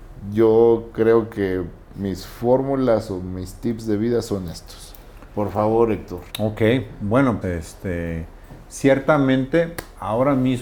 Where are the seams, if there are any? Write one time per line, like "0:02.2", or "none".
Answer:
0:06.3
0:07.4